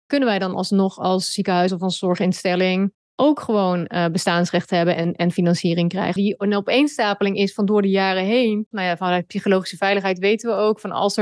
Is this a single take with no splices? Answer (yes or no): no